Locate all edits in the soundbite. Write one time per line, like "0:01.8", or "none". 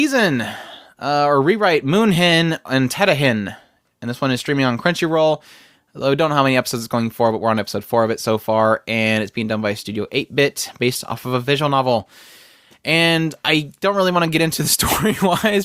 none